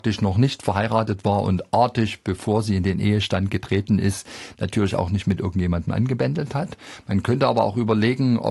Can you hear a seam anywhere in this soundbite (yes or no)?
no